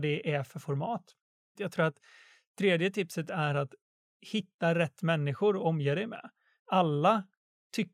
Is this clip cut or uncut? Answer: cut